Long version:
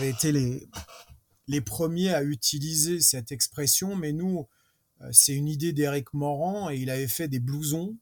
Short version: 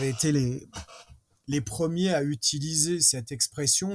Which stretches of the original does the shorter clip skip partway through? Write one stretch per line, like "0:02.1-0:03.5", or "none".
none